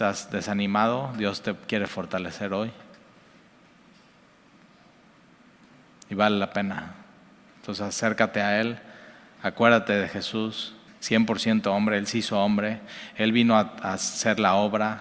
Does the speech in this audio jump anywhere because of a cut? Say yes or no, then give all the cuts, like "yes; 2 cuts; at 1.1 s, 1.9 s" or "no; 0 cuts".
yes; 1 cut; at 10.9 s